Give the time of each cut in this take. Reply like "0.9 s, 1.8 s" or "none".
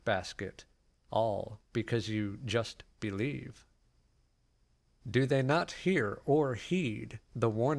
none